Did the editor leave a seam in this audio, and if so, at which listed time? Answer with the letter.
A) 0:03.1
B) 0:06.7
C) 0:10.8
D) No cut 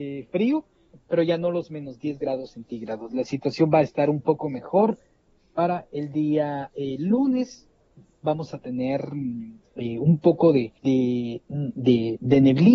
C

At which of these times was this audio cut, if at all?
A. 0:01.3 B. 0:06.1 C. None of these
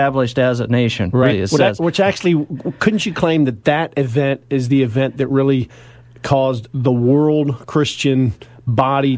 A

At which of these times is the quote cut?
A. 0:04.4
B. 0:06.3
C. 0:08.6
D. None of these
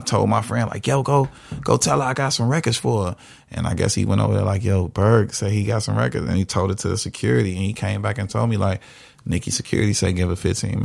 D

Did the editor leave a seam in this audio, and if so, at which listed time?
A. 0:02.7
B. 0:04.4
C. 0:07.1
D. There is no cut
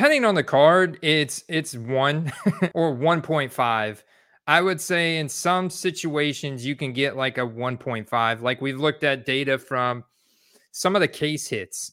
A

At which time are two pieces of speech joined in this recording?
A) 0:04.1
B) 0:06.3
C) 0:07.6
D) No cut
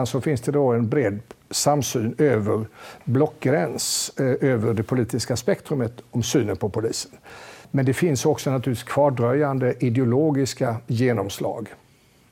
C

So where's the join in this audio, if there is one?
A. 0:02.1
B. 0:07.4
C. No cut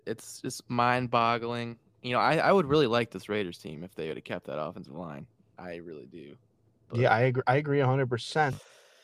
C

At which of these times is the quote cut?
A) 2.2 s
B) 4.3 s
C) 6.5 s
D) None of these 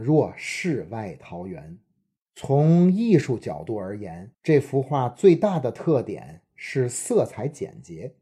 D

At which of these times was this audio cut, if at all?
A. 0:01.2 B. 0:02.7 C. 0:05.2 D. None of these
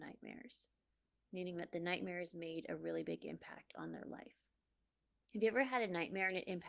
C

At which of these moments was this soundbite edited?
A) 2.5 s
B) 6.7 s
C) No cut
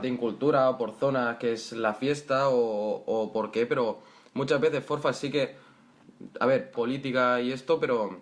B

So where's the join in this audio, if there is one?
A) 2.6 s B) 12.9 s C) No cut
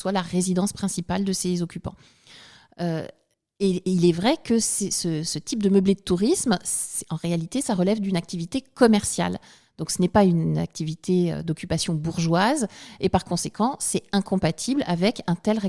C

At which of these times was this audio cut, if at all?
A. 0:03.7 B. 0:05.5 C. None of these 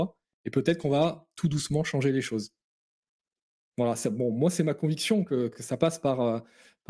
C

